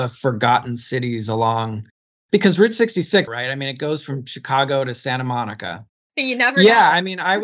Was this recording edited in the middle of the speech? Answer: yes; 2 cuts; at 3.3 s, 6.1 s

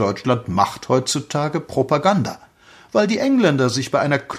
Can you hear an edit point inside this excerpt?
no; 0 cuts

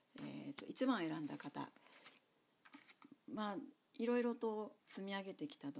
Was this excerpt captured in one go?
no; 1 cut; at 4.8 s

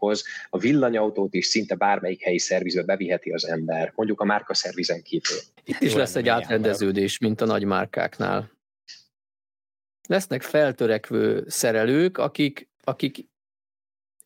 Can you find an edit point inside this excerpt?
yes; 1 cut; at 5.6 s

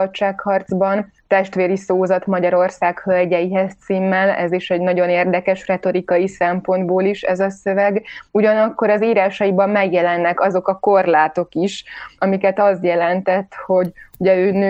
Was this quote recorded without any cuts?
yes; 0 cuts

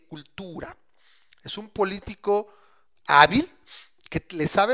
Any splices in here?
no; 0 cuts

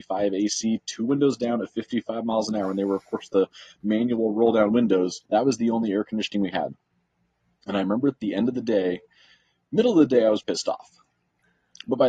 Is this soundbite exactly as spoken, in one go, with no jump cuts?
no; 2 cuts; at 5.3 s, 10.4 s

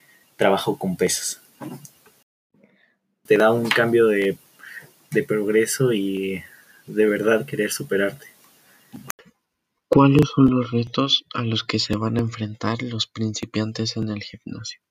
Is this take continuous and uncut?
no; 1 cut; at 3.3 s

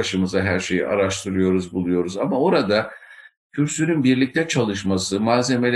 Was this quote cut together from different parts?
no; 0 cuts

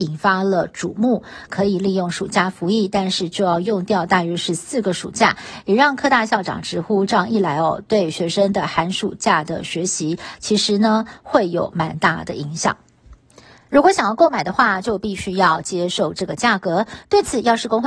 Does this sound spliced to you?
yes; 2 cuts; at 1.5 s, 13.7 s

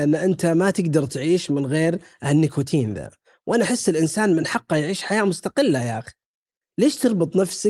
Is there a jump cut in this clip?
no; 0 cuts

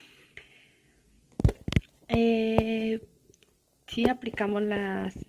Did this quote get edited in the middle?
no; 0 cuts

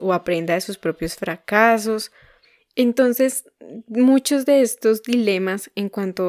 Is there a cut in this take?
no; 0 cuts

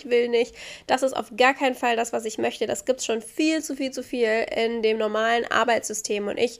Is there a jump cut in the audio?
no; 0 cuts

